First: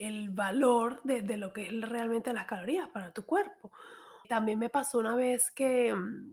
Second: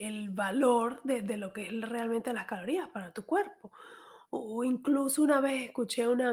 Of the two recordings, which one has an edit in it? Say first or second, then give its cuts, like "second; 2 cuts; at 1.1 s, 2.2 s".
first; 1 cut; at 4.2 s